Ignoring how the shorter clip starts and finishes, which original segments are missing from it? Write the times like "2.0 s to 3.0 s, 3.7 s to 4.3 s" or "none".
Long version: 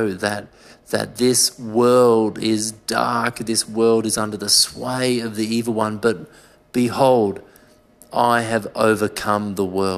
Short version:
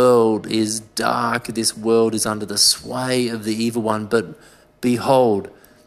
none

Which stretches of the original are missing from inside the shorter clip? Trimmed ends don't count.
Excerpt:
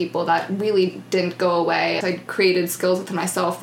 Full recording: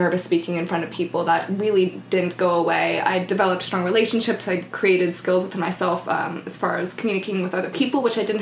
3.0 s to 4.5 s

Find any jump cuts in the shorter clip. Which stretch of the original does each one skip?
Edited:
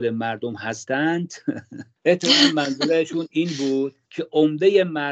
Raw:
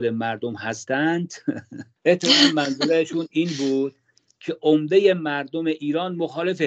4.0 s to 4.3 s

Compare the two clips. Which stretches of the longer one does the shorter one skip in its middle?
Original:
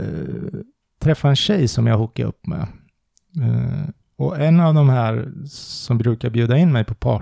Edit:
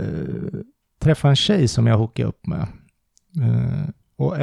none

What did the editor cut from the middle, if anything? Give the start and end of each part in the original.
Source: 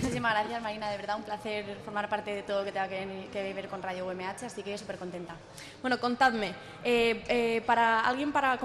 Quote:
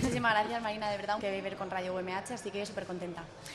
1.2 s to 3.3 s

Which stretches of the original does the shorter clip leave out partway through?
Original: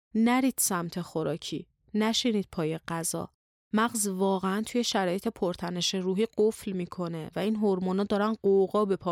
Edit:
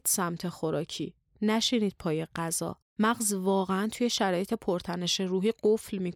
3.4 s to 3.6 s

